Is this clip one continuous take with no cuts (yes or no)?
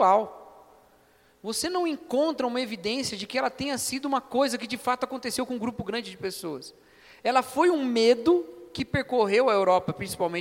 yes